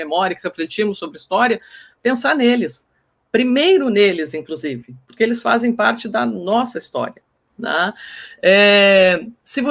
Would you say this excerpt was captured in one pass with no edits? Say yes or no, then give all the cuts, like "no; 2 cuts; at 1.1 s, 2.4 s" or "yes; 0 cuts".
yes; 0 cuts